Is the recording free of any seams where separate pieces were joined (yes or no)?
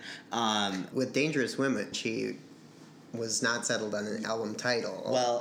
no